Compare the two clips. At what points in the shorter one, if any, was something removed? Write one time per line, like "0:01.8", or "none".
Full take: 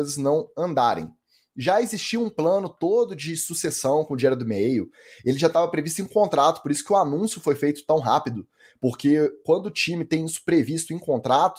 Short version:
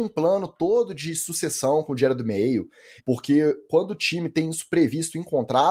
0:03.0